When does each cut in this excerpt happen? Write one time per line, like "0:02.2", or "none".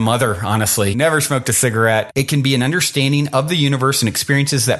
0:00.9
0:02.1